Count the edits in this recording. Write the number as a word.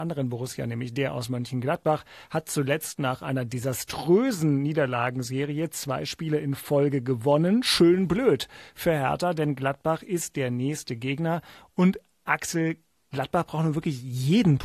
zero